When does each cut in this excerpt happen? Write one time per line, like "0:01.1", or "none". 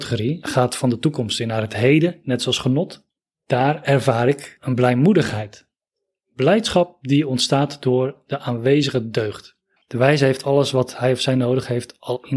0:09.8